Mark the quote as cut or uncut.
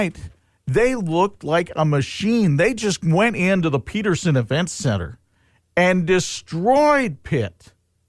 uncut